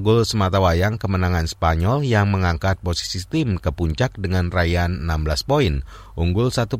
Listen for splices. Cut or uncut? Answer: uncut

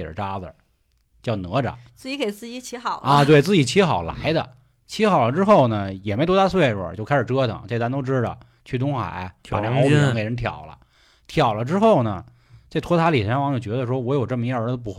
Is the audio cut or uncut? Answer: uncut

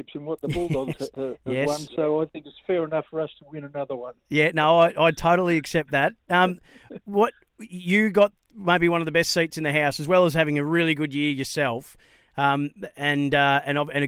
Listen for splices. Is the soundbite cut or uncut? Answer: uncut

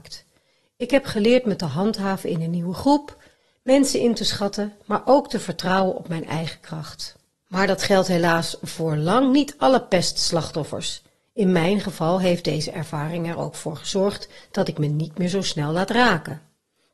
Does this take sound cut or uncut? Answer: uncut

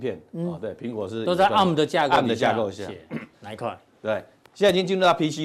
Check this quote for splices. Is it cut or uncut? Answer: cut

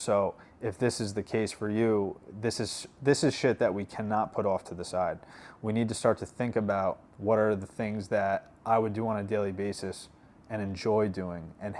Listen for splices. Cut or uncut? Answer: cut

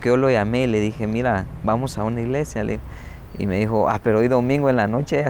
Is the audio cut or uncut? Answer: uncut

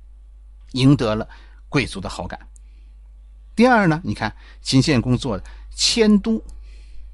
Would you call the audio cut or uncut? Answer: uncut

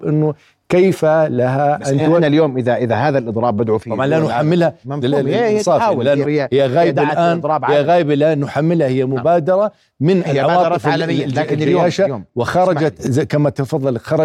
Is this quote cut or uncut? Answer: cut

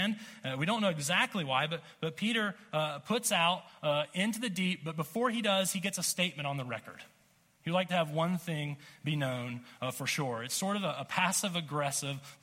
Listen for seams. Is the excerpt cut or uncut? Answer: uncut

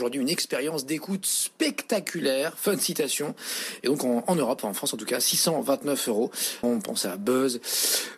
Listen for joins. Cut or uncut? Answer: cut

